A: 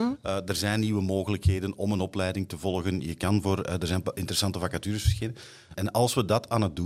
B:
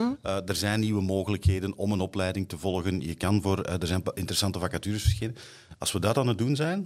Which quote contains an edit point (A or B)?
A